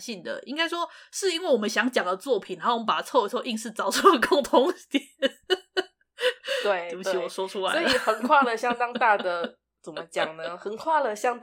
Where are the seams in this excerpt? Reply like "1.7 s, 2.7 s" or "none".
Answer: none